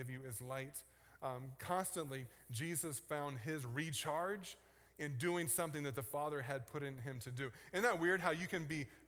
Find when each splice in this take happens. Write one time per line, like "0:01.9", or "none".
none